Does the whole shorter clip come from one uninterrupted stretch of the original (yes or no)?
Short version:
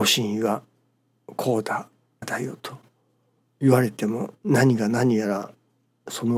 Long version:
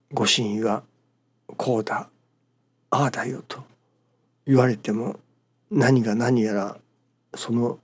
no